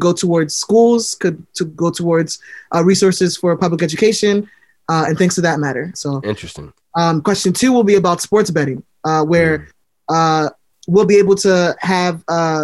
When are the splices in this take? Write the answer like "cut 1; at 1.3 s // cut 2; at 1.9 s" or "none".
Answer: cut 1; at 5.9 s